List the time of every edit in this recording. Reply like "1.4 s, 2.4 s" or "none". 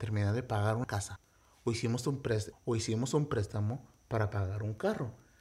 2.5 s